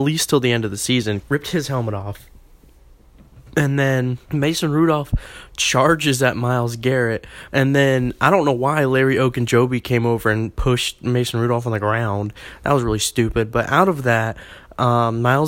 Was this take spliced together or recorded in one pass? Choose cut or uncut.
cut